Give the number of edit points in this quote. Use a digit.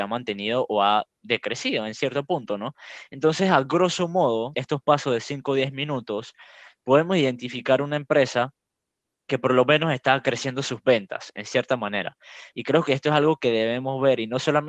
2